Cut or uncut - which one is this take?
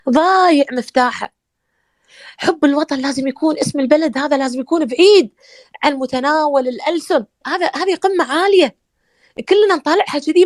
cut